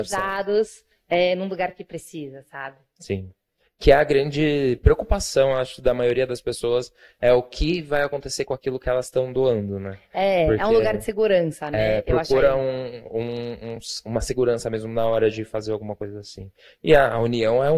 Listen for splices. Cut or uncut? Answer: uncut